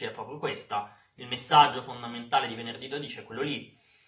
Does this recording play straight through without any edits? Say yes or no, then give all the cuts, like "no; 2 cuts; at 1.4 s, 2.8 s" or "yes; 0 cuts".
yes; 0 cuts